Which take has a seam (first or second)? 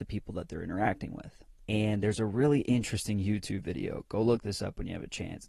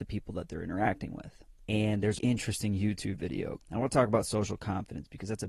second